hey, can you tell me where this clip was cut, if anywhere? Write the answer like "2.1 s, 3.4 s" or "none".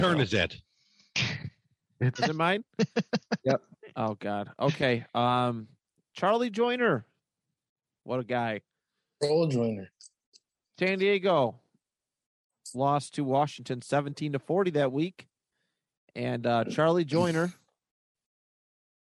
2.2 s